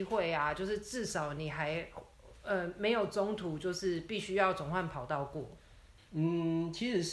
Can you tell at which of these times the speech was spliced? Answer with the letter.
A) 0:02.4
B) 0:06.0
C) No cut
C